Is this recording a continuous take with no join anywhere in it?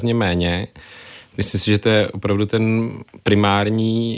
yes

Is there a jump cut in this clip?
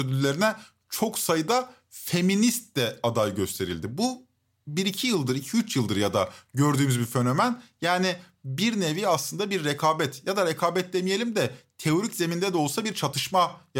no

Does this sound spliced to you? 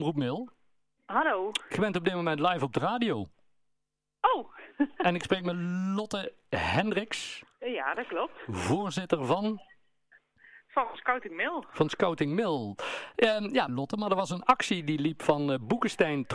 yes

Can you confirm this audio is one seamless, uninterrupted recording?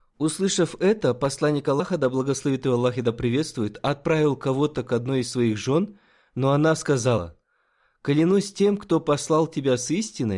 yes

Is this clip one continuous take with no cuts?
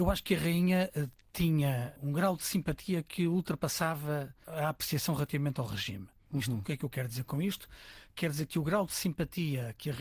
yes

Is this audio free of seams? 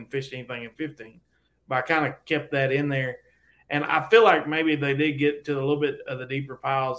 yes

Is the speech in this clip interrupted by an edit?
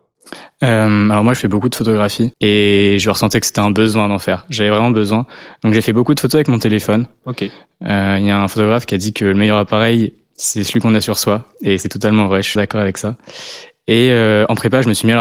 yes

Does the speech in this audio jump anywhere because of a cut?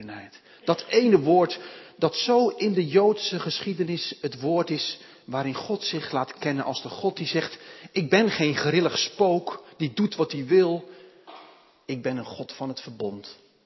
no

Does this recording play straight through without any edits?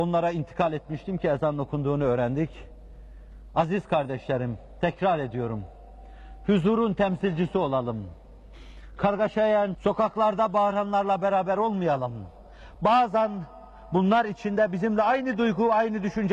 no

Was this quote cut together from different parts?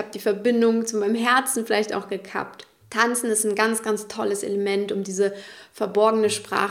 no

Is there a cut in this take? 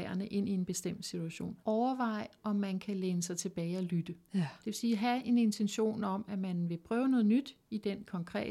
yes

